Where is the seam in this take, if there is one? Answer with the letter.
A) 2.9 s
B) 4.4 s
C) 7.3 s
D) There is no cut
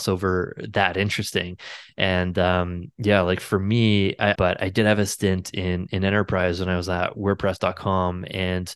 B